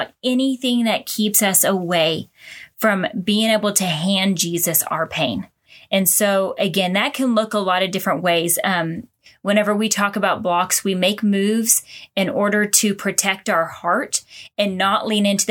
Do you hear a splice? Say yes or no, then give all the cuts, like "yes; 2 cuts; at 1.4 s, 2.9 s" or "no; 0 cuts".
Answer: no; 0 cuts